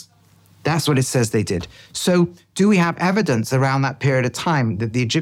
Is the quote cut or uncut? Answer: uncut